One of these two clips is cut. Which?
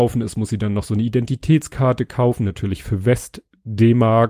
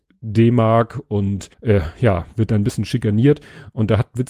second; 1 cut; at 1.5 s

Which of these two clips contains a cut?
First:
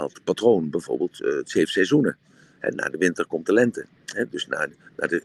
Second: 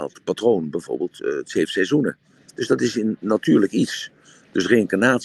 second; 1 cut; at 2.4 s

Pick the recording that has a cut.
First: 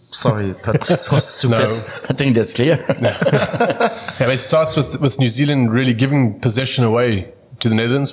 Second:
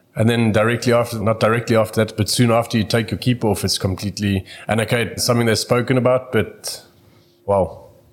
second; 2 cuts; at 1.2 s, 5.2 s

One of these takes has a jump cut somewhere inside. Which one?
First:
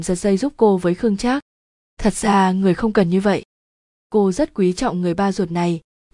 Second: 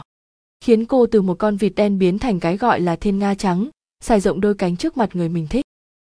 first; 2 cuts; at 1.9 s, 4.0 s

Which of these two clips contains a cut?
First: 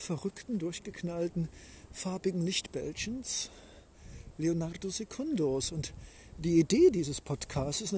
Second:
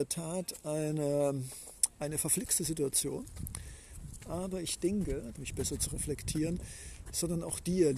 second; 1 cut; at 5.4 s

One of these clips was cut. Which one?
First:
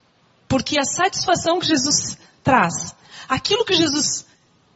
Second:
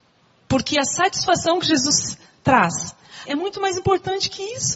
second; 1 cut; at 3.3 s

